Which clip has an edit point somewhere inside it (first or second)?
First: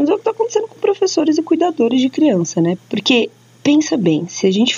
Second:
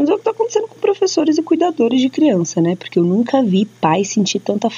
first